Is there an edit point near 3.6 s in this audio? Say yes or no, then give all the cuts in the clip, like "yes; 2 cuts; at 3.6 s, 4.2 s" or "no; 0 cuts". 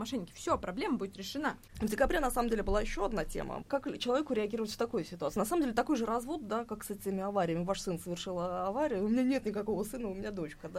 yes; 1 cut; at 3.6 s